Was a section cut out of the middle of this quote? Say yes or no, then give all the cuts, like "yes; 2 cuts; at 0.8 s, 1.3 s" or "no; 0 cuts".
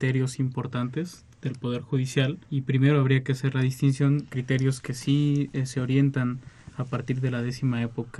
yes; 2 cuts; at 2.4 s, 4.3 s